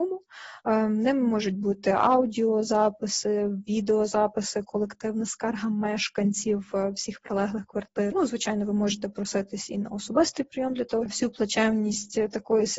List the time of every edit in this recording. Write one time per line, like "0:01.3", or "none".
0:08.1
0:11.1